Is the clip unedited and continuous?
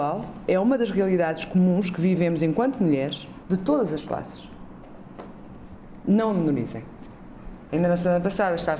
no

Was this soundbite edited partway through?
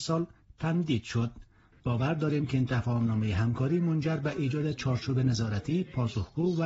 yes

